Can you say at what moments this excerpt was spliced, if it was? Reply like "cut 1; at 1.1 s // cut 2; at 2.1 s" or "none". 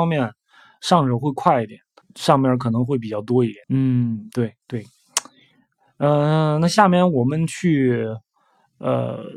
cut 1; at 2.0 s // cut 2; at 3.6 s